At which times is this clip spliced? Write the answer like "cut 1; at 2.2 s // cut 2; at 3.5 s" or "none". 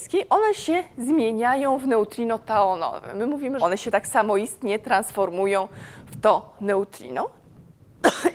cut 1; at 3.6 s